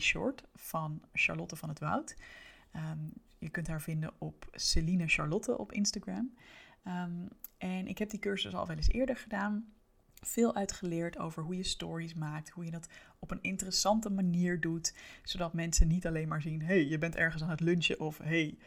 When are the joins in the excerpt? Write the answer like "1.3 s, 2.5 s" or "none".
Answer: none